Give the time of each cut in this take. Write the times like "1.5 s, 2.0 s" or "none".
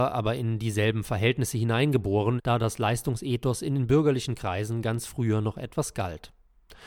2.4 s